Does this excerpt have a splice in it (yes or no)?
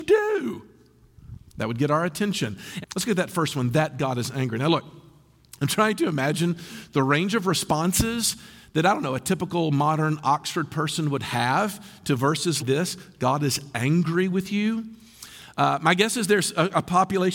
yes